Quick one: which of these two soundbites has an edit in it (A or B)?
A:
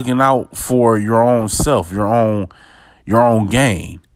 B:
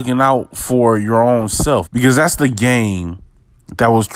B